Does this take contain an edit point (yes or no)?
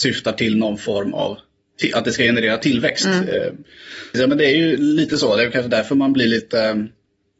yes